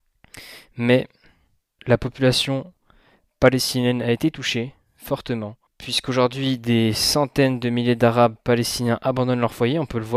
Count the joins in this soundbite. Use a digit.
2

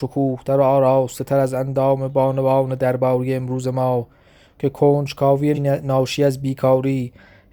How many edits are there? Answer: 1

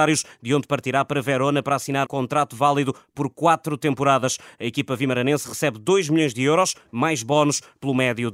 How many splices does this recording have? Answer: 1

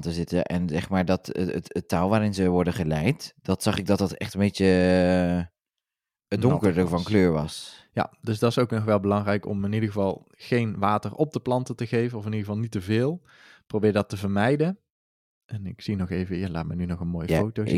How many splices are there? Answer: 0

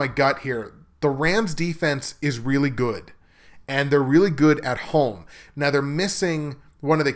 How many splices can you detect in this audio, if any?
0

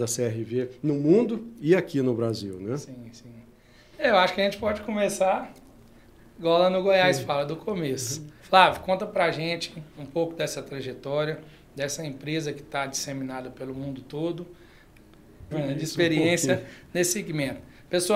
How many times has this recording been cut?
2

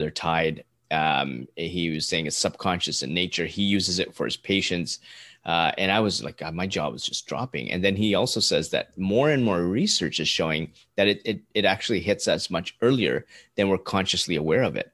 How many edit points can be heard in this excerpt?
0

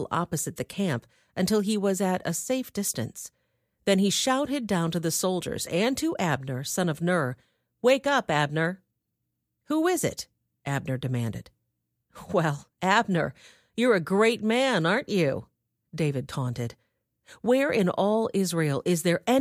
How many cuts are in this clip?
0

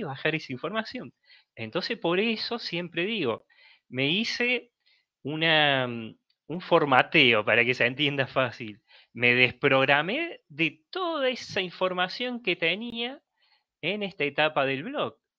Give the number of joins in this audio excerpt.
1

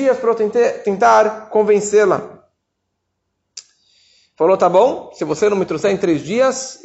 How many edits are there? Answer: 0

